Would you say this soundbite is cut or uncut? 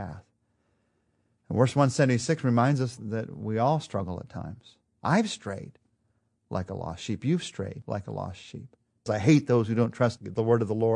cut